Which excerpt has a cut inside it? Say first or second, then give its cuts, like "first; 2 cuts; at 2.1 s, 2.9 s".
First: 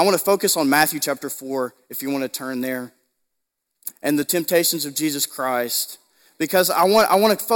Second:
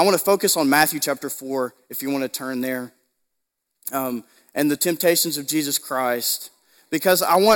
first; 1 cut; at 3.9 s